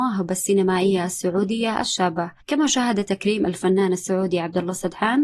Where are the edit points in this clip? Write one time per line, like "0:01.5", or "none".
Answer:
0:02.4

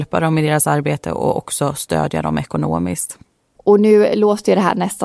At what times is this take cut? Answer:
none

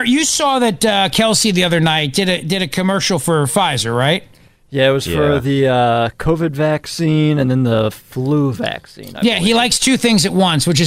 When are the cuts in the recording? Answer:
none

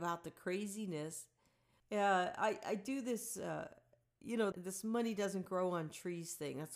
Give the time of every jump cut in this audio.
0:01.8
0:04.5

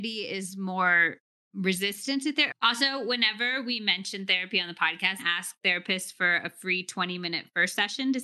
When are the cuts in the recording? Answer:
0:02.5
0:05.2

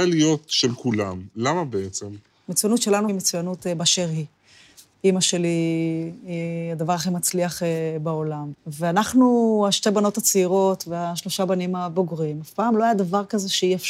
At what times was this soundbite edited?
0:03.1
0:04.9
0:08.5

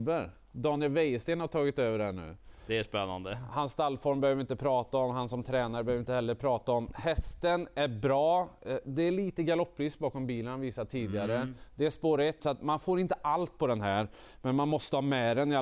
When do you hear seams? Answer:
0:12.4

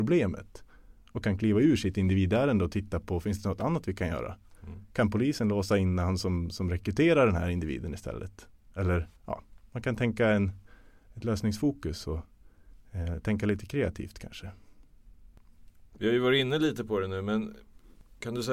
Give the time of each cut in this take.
0:09.2

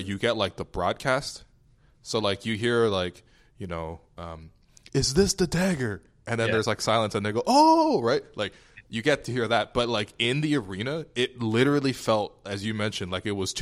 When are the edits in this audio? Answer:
none

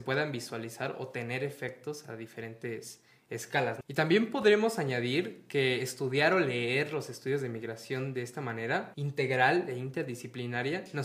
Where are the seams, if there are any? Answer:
0:03.8
0:08.9

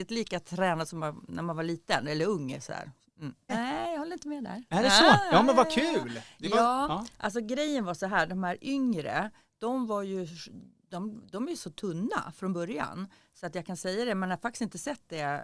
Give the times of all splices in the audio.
0:03.5

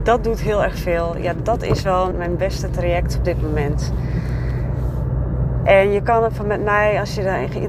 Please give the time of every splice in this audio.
0:02.1

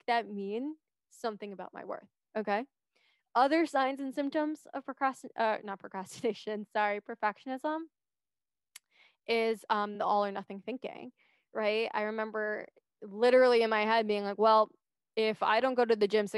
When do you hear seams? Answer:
none

